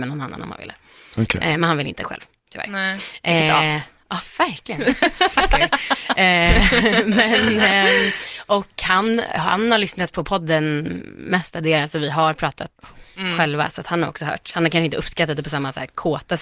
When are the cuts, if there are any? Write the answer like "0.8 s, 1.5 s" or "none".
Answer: none